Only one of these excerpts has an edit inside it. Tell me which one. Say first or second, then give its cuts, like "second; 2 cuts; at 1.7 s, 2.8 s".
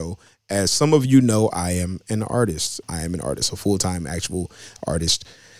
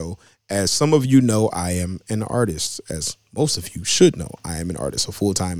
first; 1 cut; at 2.8 s